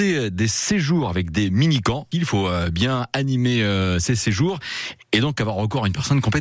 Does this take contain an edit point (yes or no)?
yes